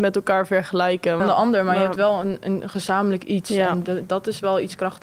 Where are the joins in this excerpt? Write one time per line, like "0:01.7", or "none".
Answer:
0:01.2

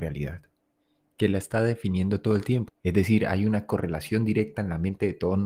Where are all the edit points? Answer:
0:02.7

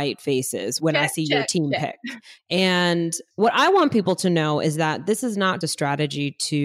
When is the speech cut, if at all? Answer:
0:02.4
0:05.6

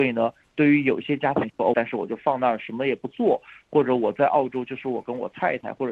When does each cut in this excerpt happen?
0:01.7

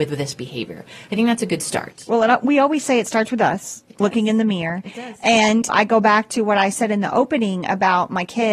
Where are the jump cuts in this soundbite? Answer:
0:05.7

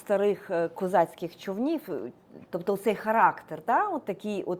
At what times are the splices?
0:02.5

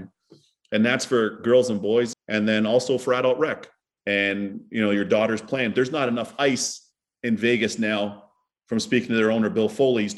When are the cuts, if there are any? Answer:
0:02.1
0:04.0

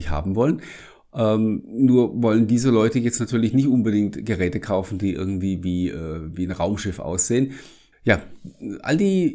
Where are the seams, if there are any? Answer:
0:07.9

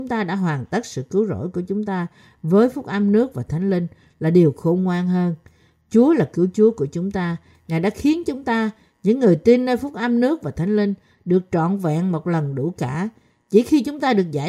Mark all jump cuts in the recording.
none

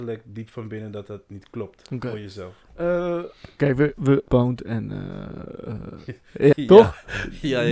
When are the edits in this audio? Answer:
0:04.3
0:06.5

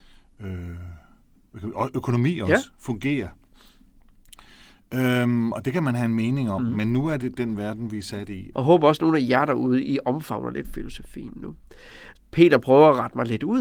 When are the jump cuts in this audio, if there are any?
0:07.2
0:08.5
0:12.1

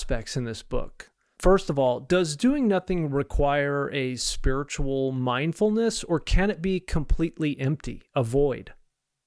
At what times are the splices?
0:01.3

